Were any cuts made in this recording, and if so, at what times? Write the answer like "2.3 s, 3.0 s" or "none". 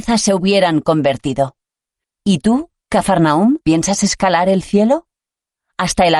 2.0 s, 3.6 s

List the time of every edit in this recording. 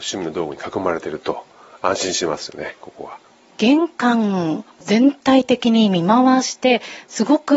none

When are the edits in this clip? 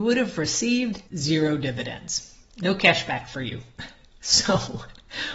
1.1 s

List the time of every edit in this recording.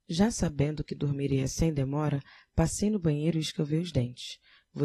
none

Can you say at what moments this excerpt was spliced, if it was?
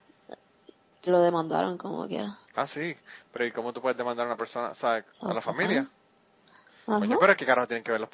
1.1 s, 2.4 s, 5.1 s

